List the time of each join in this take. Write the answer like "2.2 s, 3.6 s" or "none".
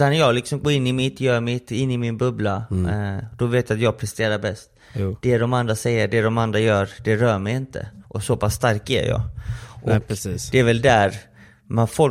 none